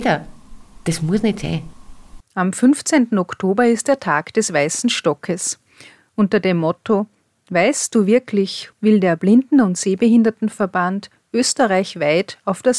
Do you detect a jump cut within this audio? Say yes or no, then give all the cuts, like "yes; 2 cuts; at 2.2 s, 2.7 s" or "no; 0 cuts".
yes; 2 cuts; at 2.2 s, 8.7 s